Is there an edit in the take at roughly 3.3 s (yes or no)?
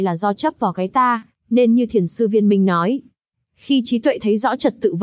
yes